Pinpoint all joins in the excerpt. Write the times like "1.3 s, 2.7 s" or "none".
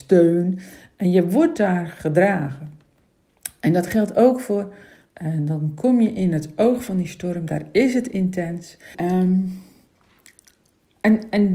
5.0 s, 8.9 s